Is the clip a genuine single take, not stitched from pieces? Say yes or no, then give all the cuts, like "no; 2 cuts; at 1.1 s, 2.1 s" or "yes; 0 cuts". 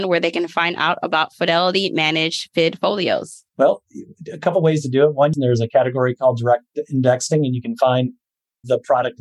no; 1 cut; at 5.3 s